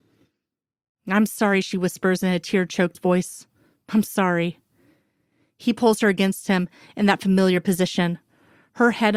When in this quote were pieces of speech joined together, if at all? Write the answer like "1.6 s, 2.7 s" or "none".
4.0 s